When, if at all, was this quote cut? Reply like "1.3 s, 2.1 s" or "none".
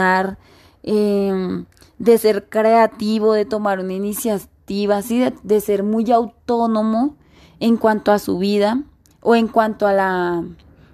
none